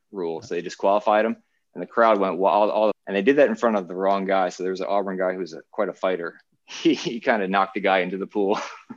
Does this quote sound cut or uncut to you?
cut